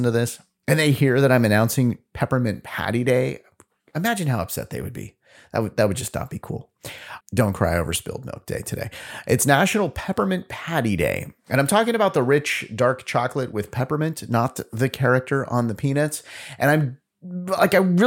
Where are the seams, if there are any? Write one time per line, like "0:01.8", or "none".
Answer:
0:07.2